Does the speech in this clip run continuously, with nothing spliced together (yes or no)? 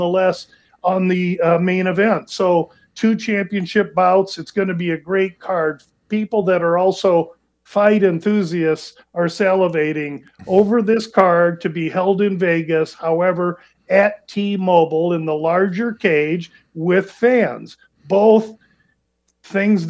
yes